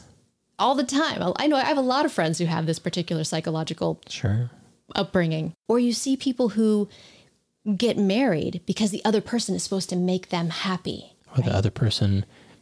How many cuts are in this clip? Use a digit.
2